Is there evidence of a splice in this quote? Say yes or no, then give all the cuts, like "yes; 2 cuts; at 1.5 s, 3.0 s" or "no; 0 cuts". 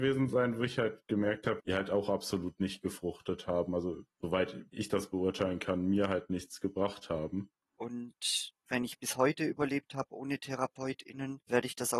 yes; 2 cuts; at 1.6 s, 7.8 s